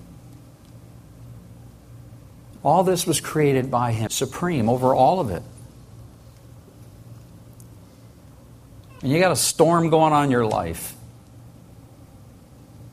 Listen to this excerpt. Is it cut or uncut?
cut